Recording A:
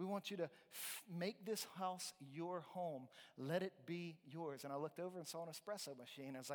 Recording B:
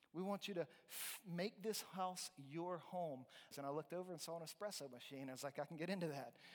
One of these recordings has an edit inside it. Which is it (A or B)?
B